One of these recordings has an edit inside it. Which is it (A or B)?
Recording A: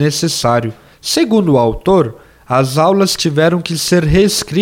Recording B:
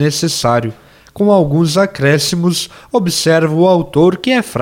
A